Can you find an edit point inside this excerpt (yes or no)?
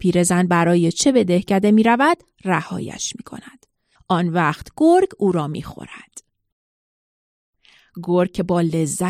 yes